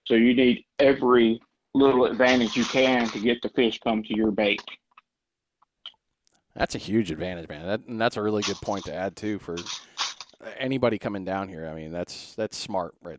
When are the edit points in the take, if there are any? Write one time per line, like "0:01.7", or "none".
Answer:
none

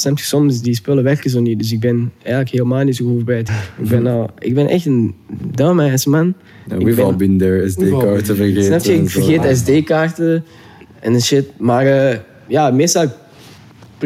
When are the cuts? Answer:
0:03.5

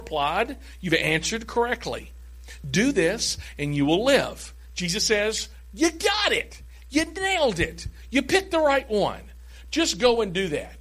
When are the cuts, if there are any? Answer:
none

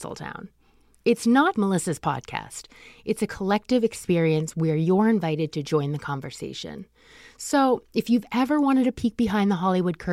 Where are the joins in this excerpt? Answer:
0:01.6

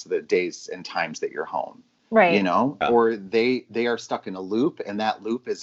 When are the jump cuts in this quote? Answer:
0:02.8

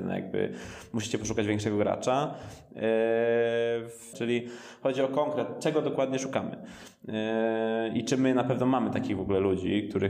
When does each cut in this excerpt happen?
0:04.1

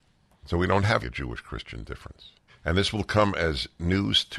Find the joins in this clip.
0:01.0
0:02.5

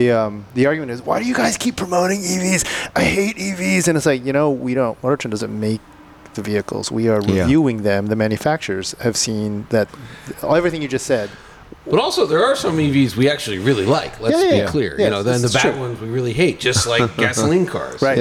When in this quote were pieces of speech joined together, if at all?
none

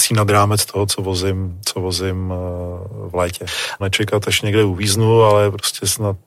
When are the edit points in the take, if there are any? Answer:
0:03.8

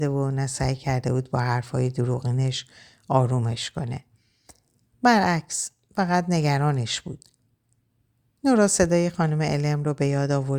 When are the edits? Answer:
none

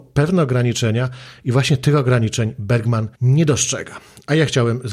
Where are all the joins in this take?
0:03.2

